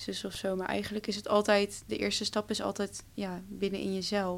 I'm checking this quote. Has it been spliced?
no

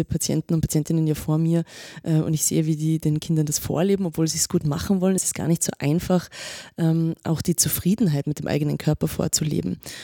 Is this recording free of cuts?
yes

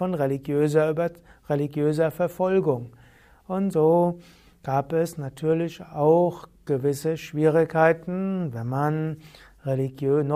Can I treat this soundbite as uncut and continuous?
yes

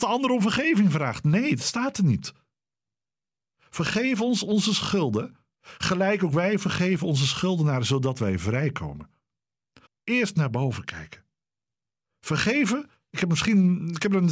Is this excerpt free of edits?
no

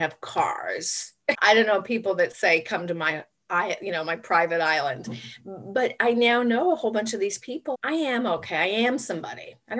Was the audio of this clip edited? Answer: yes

